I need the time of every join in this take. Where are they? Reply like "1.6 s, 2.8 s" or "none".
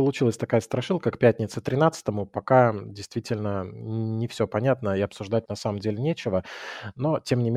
5.5 s